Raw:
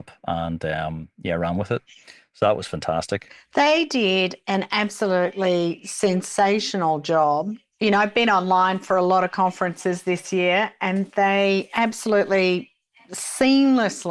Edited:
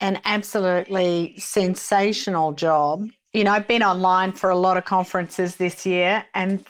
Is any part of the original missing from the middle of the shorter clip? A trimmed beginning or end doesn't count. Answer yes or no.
no